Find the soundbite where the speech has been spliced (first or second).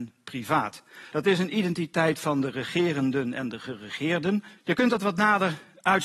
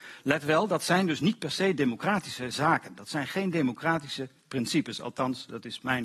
first